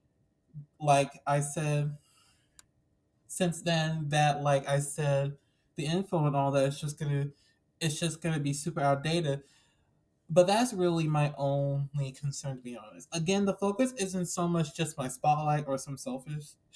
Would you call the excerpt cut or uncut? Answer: uncut